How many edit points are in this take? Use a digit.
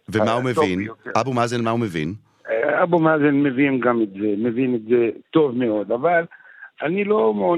0